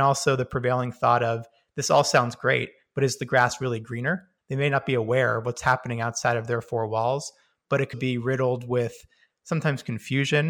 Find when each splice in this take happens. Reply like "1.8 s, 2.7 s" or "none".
4.4 s, 7.9 s